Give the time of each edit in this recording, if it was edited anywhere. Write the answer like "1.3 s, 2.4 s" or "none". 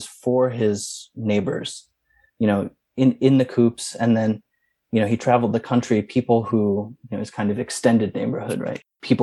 none

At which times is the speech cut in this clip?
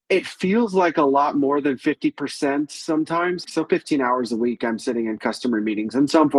3.4 s

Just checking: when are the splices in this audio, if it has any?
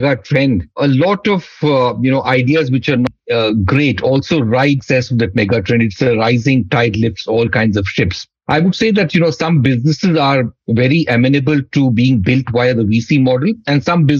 none

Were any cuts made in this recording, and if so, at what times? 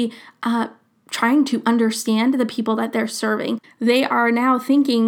3.6 s

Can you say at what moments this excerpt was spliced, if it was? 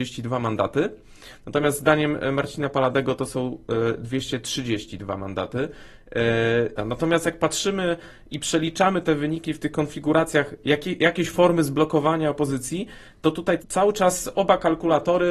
6.8 s, 13.6 s

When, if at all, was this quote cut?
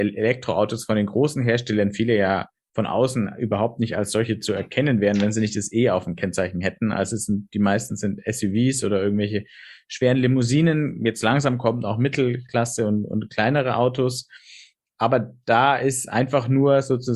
none

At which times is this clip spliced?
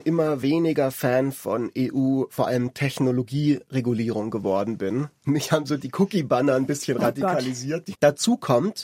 8.0 s

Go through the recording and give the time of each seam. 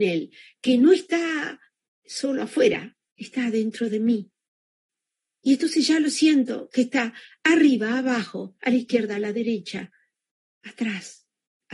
none

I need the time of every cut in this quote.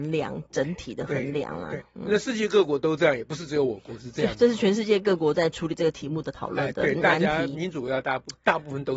none

